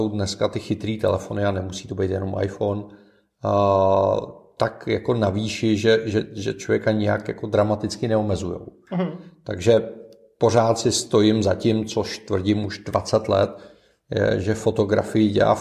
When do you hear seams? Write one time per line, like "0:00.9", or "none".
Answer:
none